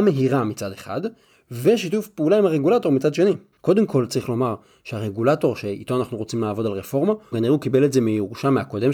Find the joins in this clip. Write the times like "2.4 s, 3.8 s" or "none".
3.5 s, 7.3 s